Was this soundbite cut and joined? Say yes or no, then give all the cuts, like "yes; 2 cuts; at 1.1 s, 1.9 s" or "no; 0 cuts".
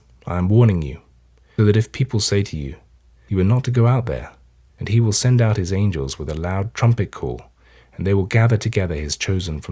yes; 3 cuts; at 1.6 s, 3.2 s, 4.7 s